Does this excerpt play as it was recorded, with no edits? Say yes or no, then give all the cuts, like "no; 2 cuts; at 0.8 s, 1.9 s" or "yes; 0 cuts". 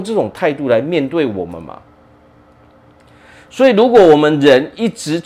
yes; 0 cuts